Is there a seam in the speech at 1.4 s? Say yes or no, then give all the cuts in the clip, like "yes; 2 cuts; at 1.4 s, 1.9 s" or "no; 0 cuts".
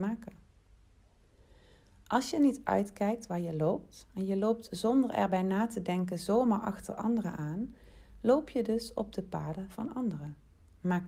no; 0 cuts